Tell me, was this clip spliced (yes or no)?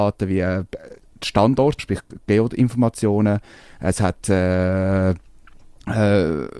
yes